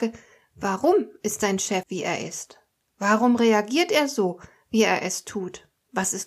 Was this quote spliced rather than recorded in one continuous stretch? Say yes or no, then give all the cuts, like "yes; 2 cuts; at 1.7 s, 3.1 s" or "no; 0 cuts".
yes; 1 cut; at 1.8 s